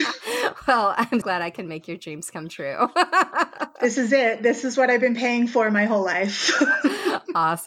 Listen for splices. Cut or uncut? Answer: cut